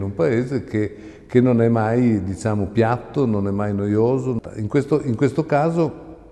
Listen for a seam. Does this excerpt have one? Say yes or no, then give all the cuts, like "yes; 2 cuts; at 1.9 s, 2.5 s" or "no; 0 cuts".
no; 0 cuts